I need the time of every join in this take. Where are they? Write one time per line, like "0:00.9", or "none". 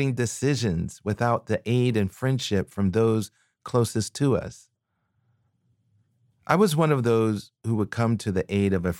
none